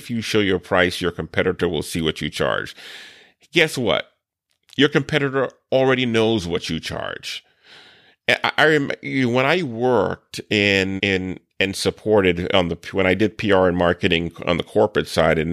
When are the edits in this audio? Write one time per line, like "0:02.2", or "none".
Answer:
0:11.0